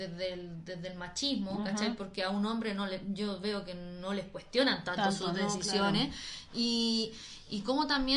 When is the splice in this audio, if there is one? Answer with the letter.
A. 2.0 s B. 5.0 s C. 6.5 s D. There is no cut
D